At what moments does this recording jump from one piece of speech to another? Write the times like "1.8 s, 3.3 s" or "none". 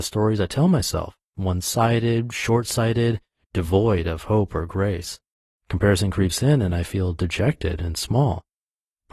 1.3 s, 5.6 s